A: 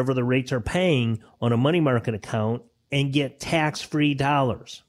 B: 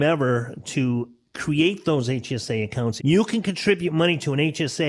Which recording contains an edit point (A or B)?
B